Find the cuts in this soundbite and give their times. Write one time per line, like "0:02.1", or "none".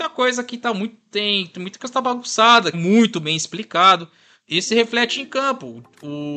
0:02.7